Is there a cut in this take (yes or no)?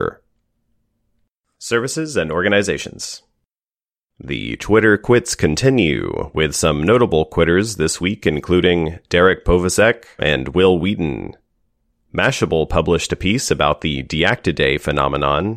yes